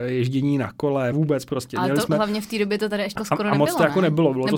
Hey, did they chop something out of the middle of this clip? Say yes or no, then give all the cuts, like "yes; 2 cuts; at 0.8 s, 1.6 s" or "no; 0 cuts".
yes; 2 cuts; at 1.1 s, 3.2 s